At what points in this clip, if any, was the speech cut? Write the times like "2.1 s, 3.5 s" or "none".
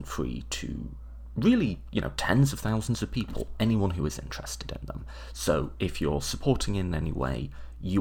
none